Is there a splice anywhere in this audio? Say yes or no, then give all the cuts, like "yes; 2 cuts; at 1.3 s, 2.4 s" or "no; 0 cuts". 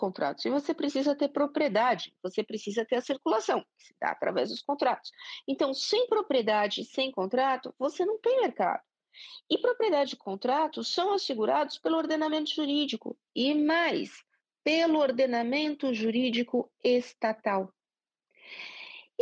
no; 0 cuts